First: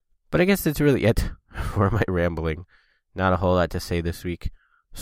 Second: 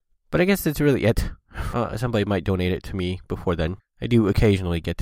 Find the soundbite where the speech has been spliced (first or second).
second